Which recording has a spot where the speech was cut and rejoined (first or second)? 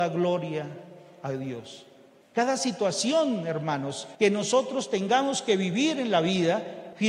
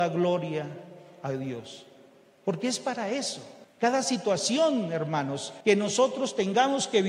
first